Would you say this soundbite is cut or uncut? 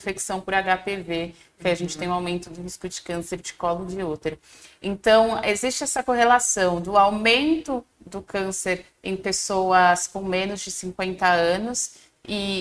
uncut